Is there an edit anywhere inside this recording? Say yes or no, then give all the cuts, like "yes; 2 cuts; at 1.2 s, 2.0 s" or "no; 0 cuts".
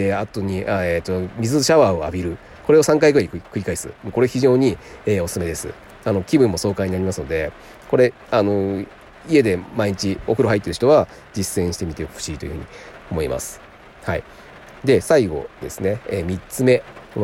no; 0 cuts